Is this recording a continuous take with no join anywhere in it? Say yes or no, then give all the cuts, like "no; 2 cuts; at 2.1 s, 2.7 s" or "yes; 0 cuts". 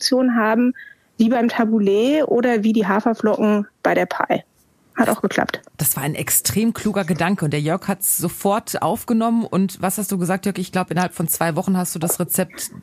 yes; 0 cuts